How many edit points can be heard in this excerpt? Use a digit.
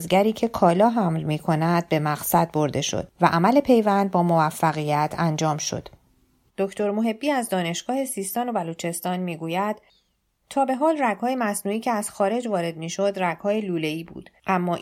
1